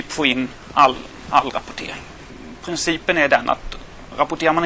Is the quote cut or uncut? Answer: uncut